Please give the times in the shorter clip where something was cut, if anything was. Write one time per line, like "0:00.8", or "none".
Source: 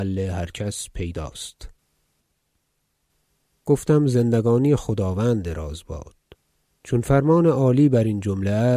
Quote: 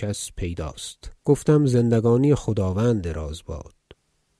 0:01.2